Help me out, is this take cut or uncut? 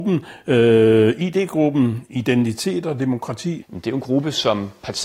cut